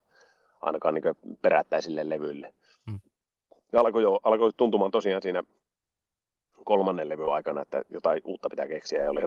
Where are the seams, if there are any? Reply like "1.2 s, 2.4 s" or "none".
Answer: none

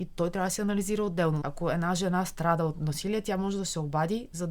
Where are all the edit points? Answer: 1.4 s

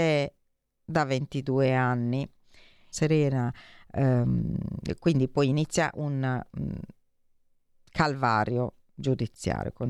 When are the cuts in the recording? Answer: 2.9 s

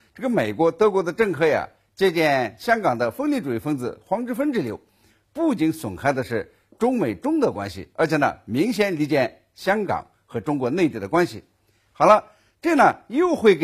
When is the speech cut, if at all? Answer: none

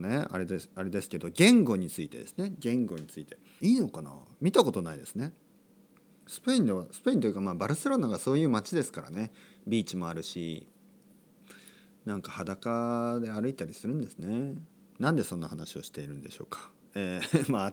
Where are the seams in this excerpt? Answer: 3.6 s

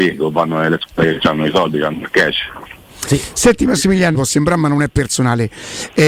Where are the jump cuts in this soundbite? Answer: 4.1 s

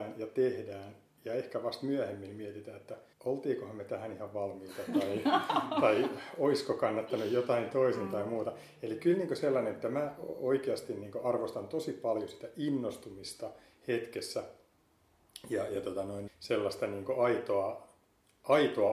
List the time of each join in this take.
3.1 s, 16.3 s

